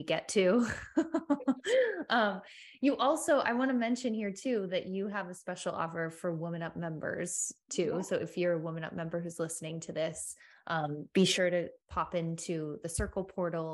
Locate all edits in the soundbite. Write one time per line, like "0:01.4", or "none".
0:11.8